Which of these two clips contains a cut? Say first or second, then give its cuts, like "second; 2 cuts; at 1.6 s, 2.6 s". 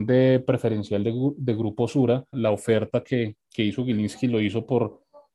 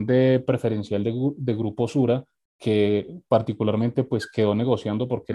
first; 1 cut; at 2.3 s